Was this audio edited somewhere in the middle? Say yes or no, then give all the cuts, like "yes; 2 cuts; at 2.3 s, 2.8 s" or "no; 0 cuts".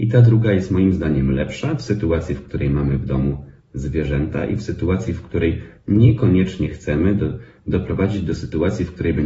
no; 0 cuts